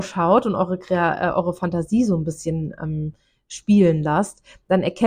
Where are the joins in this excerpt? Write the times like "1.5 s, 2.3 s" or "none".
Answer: none